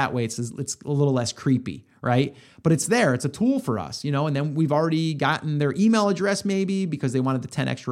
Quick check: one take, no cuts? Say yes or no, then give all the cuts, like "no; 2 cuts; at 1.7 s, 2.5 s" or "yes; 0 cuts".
yes; 0 cuts